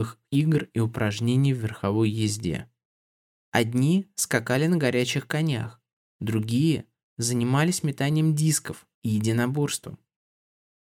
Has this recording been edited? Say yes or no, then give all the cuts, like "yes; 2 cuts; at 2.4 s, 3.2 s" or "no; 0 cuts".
yes; 2 cuts; at 3.4 s, 8.9 s